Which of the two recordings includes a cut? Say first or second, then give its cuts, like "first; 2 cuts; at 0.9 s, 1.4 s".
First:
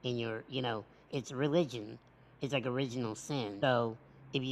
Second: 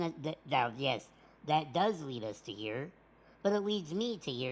first; 2 cuts; at 1.1 s, 3.6 s